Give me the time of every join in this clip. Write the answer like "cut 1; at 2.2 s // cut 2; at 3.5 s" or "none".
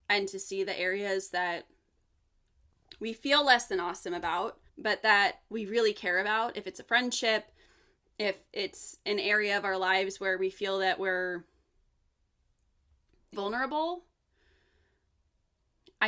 cut 1; at 4.7 s // cut 2; at 13.3 s